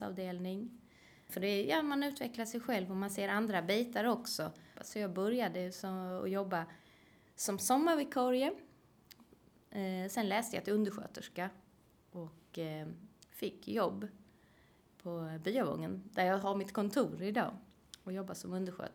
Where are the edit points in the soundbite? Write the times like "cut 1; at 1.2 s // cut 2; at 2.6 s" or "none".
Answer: cut 1; at 1.3 s // cut 2; at 4.8 s